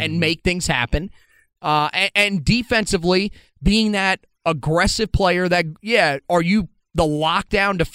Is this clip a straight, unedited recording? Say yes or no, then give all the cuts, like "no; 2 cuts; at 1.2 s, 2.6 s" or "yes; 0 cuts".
yes; 0 cuts